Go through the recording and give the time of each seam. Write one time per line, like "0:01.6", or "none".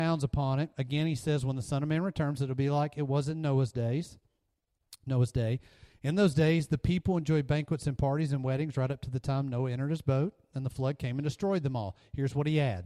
none